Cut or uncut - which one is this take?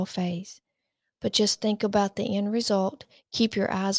uncut